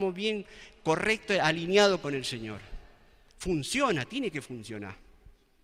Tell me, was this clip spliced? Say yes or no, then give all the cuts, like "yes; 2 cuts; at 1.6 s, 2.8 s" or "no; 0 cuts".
no; 0 cuts